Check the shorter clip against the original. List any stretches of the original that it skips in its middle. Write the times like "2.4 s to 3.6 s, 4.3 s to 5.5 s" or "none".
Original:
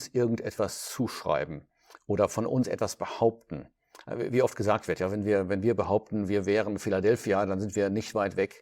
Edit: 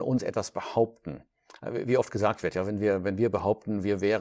none